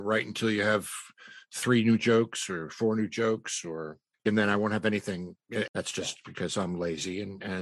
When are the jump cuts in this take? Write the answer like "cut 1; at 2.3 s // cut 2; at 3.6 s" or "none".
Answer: cut 1; at 4.2 s // cut 2; at 5.7 s